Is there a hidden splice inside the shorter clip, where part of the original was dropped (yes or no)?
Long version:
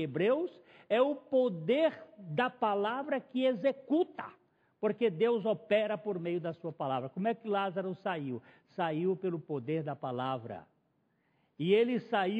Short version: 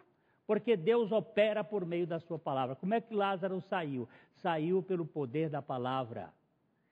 no